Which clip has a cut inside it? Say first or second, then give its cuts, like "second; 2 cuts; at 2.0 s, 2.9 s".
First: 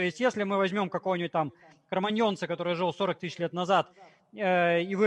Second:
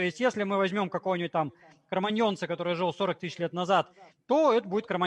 second; 1 cut; at 4.1 s